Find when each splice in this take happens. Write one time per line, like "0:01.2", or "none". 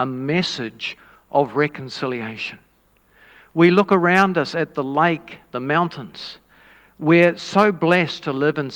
none